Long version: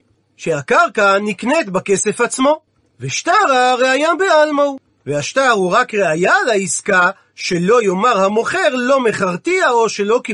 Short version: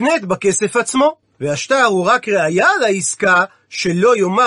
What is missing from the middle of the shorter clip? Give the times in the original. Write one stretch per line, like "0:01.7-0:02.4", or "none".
0:02.7-0:04.9